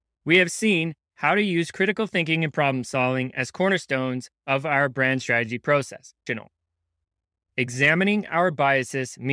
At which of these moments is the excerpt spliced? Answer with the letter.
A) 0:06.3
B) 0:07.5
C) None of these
A